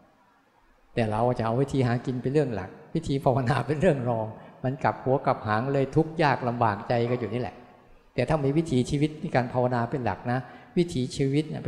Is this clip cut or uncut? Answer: uncut